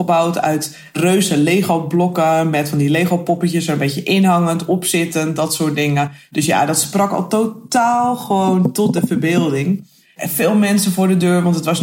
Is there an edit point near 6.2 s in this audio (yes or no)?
no